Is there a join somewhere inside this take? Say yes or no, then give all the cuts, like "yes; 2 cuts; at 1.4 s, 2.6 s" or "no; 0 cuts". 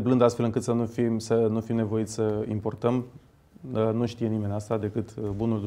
no; 0 cuts